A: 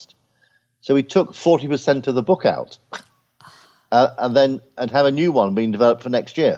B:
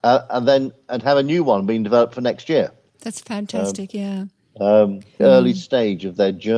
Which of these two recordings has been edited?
B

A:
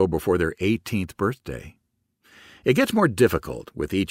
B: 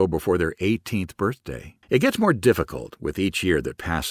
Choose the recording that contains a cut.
B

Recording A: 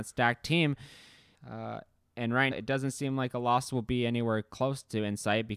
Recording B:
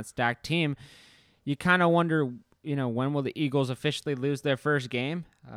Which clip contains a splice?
A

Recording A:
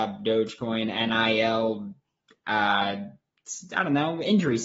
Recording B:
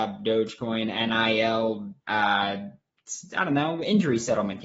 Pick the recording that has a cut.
B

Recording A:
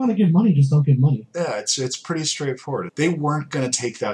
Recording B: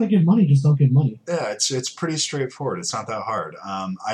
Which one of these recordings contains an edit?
A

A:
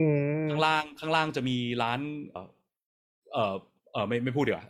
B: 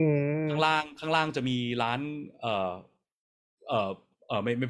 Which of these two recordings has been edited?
A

